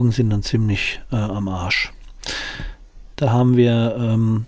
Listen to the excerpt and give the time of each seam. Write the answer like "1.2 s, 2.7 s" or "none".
3.1 s